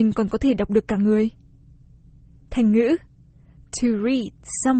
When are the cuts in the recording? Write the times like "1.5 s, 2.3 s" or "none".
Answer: none